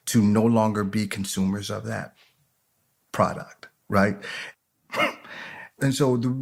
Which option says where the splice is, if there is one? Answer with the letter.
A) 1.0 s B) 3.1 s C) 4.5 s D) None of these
C